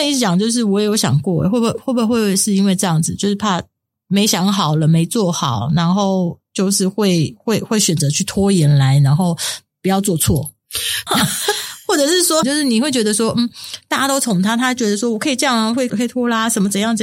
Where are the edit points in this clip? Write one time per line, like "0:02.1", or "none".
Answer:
0:11.1
0:12.4
0:15.9